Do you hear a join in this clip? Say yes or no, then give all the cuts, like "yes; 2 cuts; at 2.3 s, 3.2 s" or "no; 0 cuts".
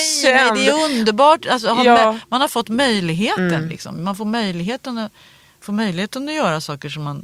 no; 0 cuts